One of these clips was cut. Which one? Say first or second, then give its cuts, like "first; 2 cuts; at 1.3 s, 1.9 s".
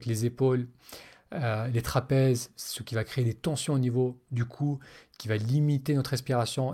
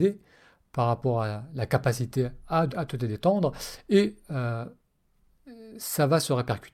second; 1 cut; at 2.7 s